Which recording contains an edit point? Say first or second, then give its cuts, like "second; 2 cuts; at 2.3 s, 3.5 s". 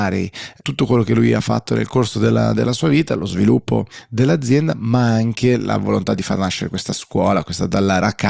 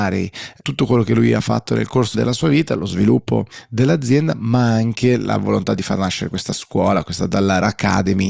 second; 1 cut; at 2.1 s